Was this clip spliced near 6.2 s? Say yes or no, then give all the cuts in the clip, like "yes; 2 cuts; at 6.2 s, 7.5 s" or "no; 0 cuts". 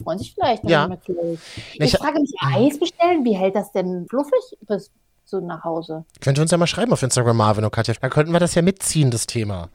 yes; 3 cuts; at 4.1 s, 6.2 s, 8.0 s